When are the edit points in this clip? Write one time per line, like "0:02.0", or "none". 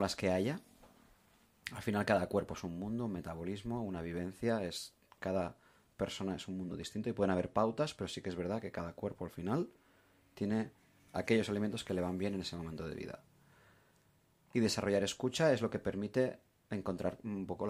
none